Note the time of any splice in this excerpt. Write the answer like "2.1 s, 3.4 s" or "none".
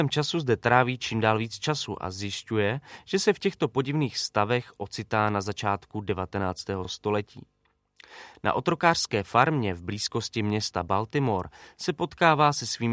none

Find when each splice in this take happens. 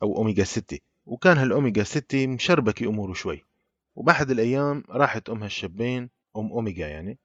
none

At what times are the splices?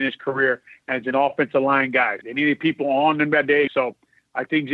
2.2 s, 3.7 s

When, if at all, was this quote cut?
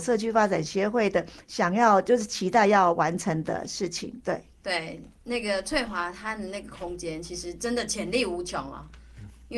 none

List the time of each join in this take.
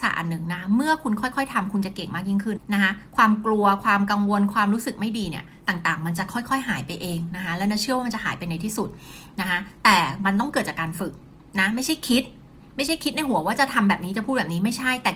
2.6 s

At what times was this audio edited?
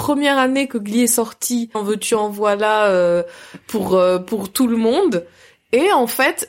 1.7 s

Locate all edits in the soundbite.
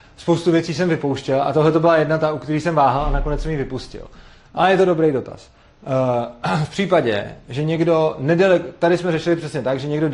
none

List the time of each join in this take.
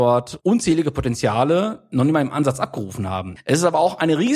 3.4 s

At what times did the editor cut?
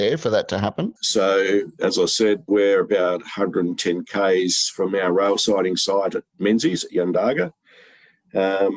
1.0 s, 2.5 s

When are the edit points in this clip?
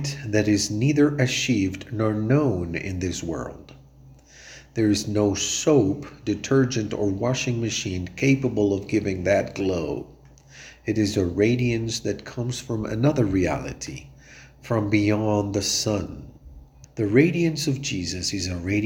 16.8 s

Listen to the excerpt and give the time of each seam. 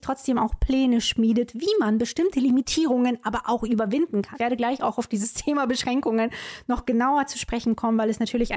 4.3 s

